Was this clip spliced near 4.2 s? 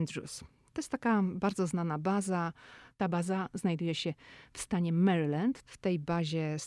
no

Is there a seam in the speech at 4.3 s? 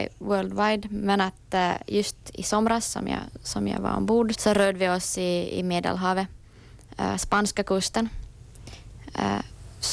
yes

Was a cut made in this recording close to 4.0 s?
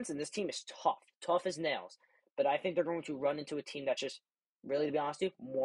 no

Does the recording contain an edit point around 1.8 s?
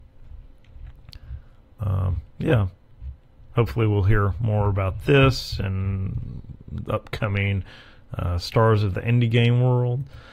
yes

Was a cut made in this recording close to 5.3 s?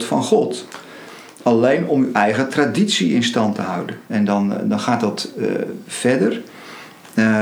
no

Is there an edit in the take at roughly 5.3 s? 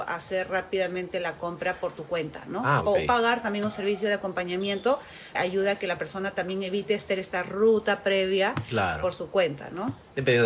yes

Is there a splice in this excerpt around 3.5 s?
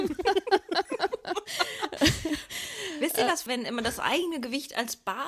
yes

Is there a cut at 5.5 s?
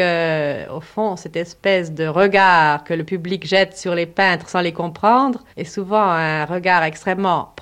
yes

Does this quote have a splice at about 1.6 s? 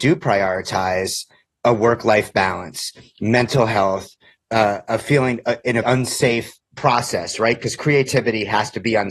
no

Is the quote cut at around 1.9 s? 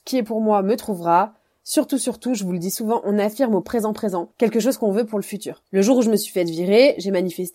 no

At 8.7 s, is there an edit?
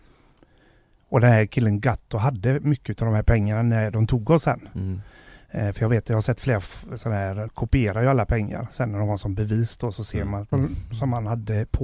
yes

